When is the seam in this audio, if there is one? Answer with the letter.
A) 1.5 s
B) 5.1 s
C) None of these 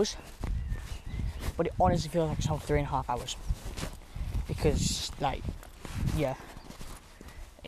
A